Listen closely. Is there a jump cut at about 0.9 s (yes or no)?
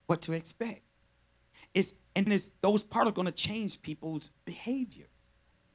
no